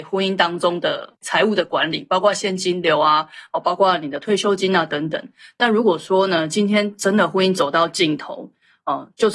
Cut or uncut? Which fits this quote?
uncut